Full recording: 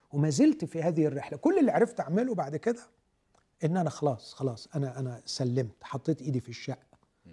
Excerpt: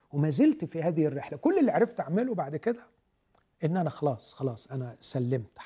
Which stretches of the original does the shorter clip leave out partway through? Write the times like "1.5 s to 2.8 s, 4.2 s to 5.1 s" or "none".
4.7 s to 4.9 s